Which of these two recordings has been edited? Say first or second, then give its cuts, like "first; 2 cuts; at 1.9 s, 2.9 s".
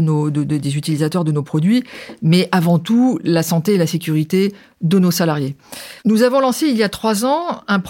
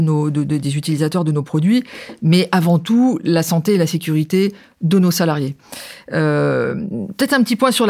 first; 1 cut; at 6.0 s